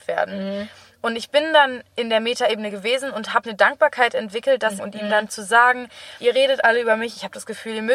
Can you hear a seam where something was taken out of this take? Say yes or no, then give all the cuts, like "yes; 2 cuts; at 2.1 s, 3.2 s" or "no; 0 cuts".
yes; 3 cuts; at 3.4 s, 4.8 s, 6.2 s